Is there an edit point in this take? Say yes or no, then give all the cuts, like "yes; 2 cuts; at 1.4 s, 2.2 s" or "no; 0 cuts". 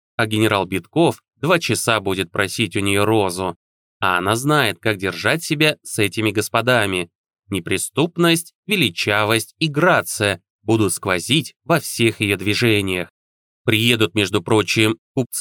no; 0 cuts